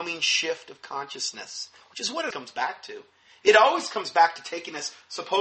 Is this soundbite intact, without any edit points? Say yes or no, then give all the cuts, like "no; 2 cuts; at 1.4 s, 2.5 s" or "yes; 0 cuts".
no; 1 cut; at 2.3 s